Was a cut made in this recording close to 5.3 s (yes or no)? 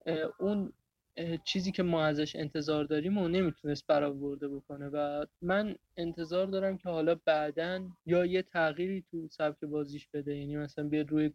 yes